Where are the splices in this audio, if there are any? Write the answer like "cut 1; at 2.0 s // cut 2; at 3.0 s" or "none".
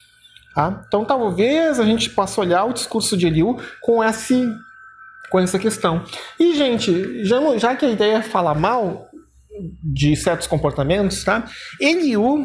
none